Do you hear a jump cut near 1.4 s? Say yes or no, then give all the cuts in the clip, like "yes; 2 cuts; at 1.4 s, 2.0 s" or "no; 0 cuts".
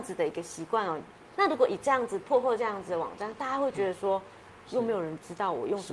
yes; 2 cuts; at 1.4 s, 4.7 s